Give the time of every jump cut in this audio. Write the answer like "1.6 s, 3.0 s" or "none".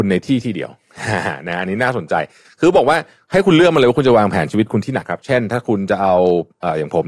5.0 s

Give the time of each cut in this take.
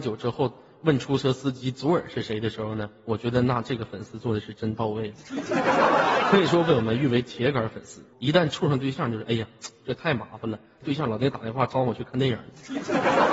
8.1 s, 10.8 s

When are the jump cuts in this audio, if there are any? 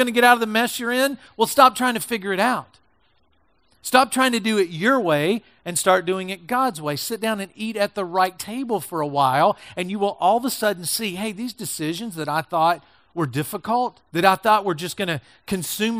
14.1 s

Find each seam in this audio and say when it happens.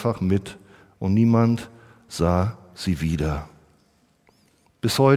none

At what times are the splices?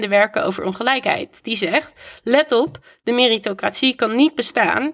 none

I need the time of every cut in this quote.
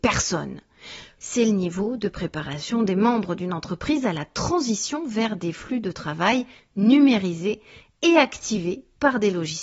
1.2 s

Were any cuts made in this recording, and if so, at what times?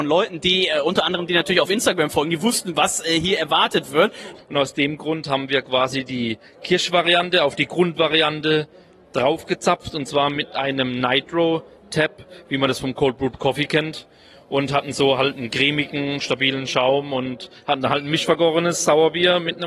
4.4 s

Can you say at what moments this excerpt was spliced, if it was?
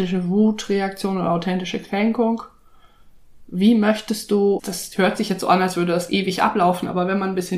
4.6 s

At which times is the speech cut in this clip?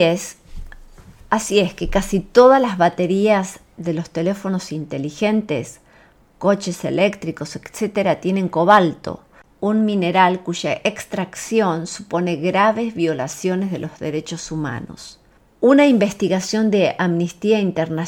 none

